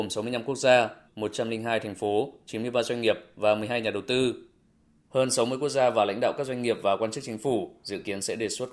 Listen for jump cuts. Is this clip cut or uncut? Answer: cut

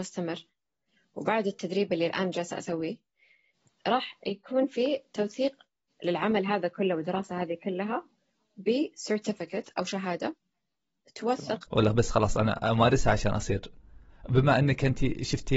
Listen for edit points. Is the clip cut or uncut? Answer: cut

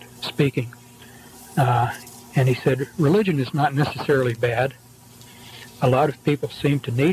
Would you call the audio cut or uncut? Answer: uncut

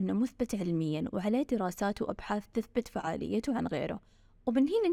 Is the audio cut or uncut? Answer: uncut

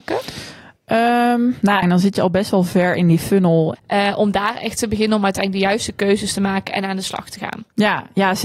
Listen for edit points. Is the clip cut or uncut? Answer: cut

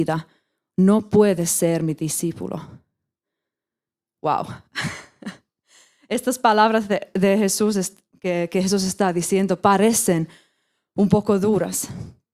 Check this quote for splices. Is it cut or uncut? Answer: uncut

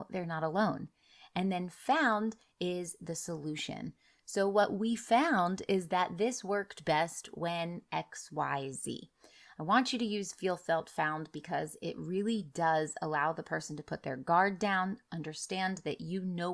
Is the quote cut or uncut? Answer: uncut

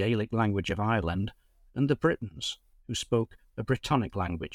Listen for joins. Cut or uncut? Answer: uncut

